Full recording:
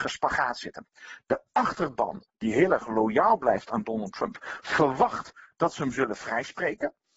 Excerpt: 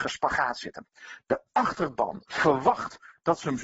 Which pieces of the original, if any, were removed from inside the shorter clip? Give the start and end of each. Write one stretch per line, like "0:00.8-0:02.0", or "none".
0:02.3-0:04.6